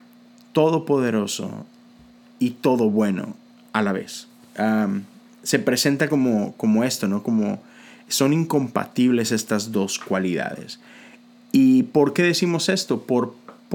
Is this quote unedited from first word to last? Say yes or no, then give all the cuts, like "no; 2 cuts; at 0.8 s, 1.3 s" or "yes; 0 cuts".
yes; 0 cuts